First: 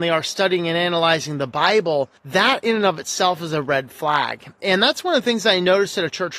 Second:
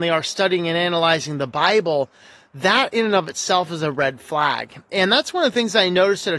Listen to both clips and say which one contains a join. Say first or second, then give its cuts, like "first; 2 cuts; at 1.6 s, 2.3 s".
first; 1 cut; at 2.2 s